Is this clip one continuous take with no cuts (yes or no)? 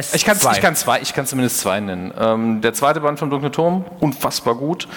yes